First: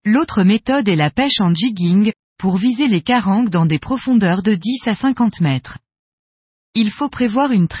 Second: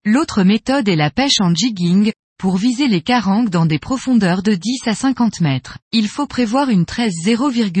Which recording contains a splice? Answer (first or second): second